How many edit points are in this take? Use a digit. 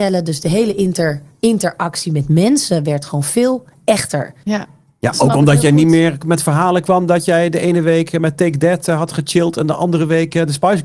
1